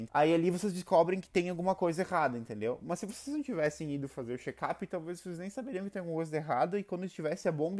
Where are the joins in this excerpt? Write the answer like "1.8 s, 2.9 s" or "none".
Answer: none

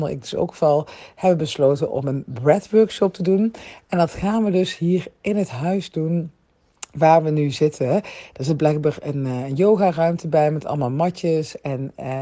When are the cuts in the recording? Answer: none

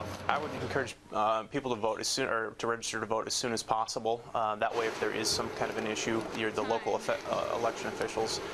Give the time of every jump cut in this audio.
6.3 s

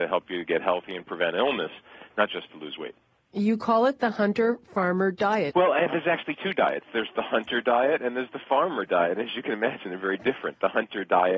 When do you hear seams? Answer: 5.5 s

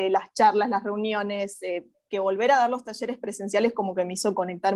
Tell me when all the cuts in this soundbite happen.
1.9 s

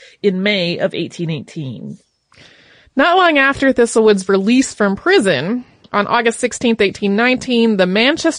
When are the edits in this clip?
none

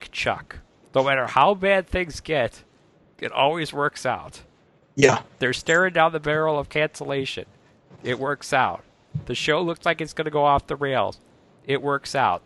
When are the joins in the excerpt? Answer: none

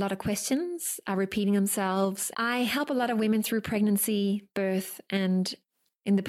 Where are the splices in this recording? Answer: 2.3 s

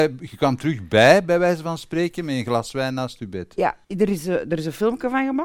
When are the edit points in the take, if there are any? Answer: 3.8 s

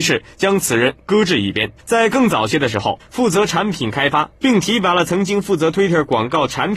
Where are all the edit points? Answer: 1.8 s, 3.0 s

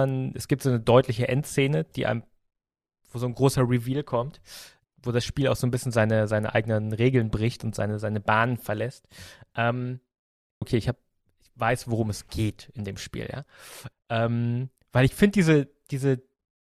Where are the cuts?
10.6 s, 13.9 s

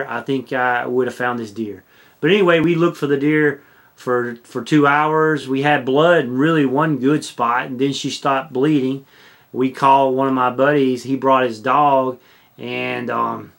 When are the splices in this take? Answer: none

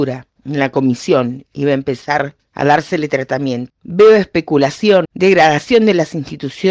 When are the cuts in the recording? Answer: 3.7 s, 5.0 s

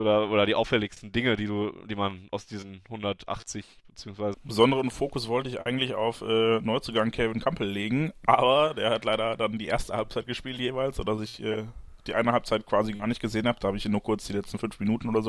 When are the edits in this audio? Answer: 4.3 s

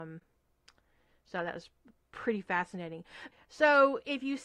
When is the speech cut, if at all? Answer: 3.3 s

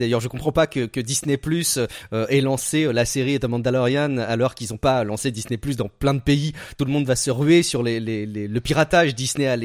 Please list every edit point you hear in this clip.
none

